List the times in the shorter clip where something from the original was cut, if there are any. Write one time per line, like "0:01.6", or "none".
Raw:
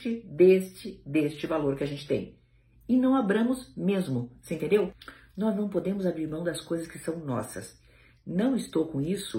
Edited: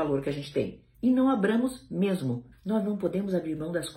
0:00.9
0:02.5